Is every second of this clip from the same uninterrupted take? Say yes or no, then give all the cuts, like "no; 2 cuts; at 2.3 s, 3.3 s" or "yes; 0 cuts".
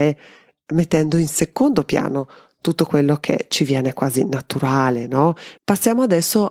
no; 1 cut; at 5.6 s